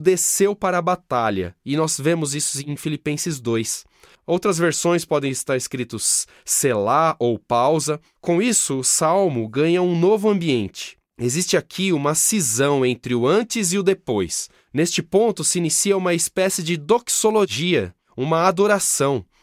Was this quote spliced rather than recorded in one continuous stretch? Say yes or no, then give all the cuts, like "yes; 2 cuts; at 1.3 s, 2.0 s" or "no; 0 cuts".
yes; 1 cut; at 4.1 s